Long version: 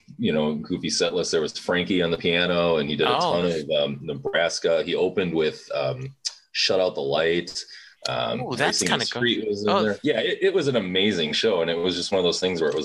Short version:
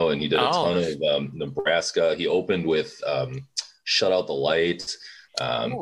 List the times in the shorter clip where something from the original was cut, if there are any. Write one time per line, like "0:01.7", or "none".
none

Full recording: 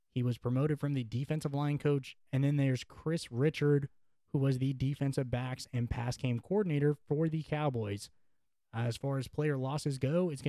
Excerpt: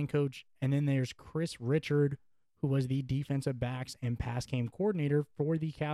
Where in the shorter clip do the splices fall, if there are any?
none

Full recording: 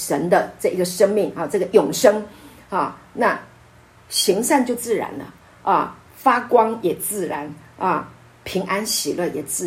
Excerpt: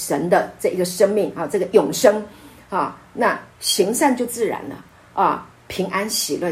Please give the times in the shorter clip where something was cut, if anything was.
0:03.5
0:05.5

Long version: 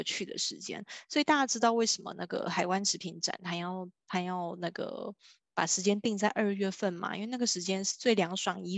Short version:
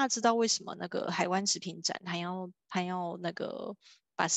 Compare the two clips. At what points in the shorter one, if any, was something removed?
none

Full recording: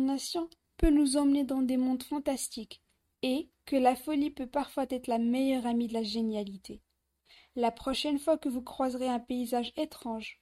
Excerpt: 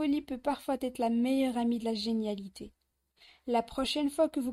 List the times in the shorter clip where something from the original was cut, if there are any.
none

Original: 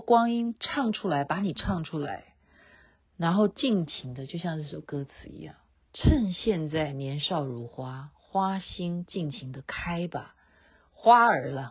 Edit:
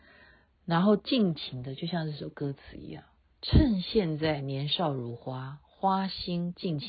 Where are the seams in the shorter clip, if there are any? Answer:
none

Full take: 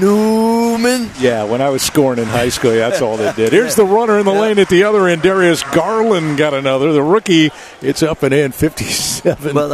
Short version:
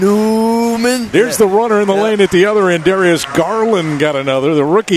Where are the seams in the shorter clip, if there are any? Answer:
0:01.1

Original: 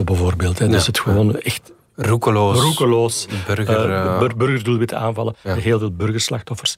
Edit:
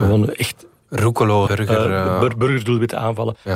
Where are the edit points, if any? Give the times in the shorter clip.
0:01.5

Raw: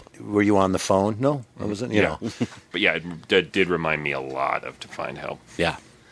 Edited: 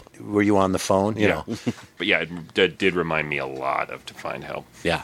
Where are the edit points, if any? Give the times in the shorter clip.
0:01.2

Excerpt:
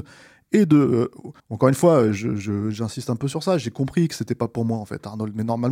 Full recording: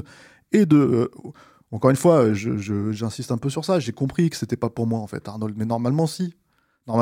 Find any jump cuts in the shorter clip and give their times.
0:01.4

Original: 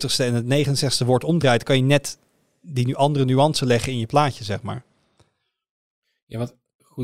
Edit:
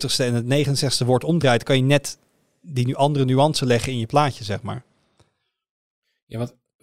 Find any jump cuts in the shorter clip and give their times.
none

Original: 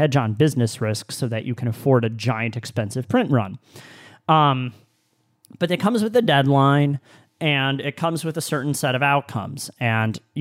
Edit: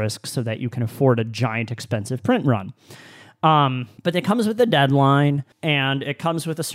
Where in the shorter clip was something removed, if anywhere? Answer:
0:04.0
0:05.5

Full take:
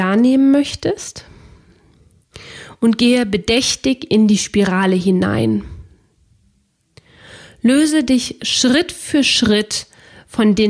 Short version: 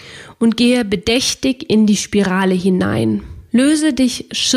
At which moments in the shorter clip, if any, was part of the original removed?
0:03.5

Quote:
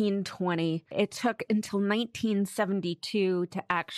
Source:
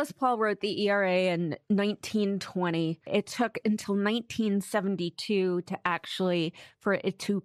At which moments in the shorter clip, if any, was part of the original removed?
none

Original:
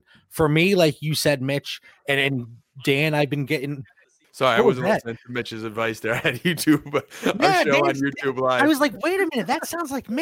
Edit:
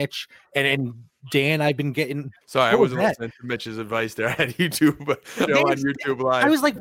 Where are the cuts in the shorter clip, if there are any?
0:02.4
0:05.5

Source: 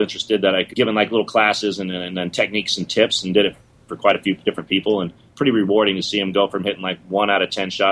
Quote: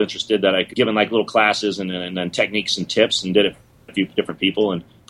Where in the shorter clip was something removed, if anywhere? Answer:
0:03.9

